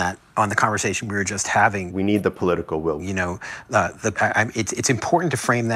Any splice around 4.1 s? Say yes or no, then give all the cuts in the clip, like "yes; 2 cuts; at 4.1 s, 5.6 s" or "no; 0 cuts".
yes; 3 cuts; at 1.9 s, 3.0 s, 4.1 s